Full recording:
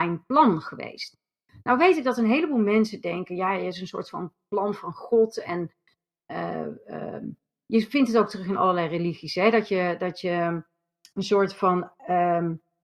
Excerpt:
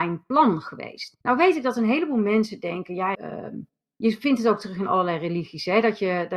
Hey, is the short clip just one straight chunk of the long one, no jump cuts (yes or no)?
no